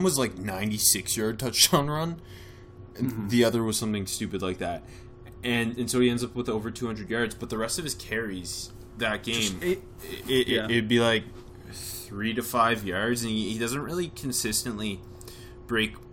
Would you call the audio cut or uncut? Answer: uncut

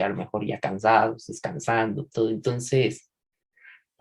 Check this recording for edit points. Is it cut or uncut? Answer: uncut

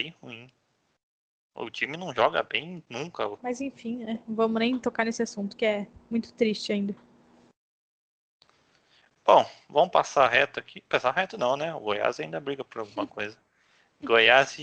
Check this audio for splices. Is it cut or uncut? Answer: cut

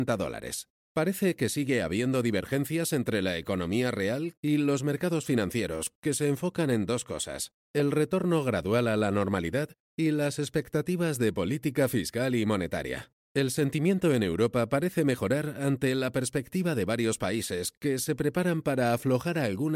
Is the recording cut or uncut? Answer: cut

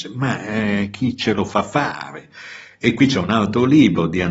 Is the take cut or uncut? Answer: uncut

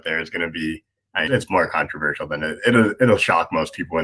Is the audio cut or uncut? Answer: cut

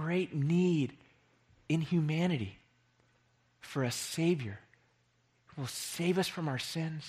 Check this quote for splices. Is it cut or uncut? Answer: uncut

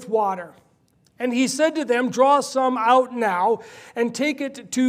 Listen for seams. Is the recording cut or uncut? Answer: cut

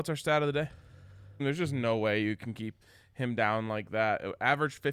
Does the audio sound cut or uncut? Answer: cut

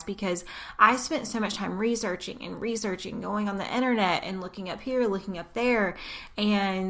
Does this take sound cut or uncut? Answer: uncut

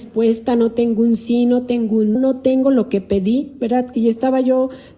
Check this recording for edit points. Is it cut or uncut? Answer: cut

